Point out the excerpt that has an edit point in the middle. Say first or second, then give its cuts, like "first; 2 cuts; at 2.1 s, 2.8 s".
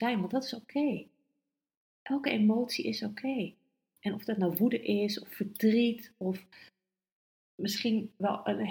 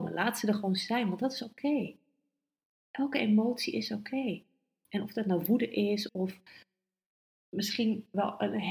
second; 1 cut; at 6.1 s